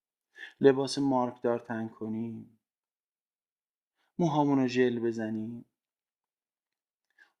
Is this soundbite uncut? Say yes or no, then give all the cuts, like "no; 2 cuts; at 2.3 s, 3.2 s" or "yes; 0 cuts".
yes; 0 cuts